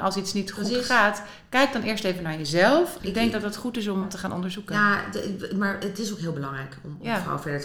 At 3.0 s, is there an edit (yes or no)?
yes